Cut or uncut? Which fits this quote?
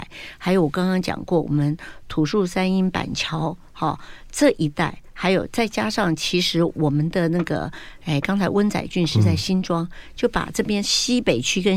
uncut